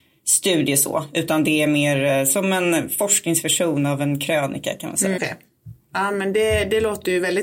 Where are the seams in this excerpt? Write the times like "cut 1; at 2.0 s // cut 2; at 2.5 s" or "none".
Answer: cut 1; at 5.2 s